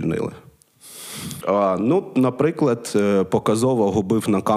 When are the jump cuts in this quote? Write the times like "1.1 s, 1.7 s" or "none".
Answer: 1.4 s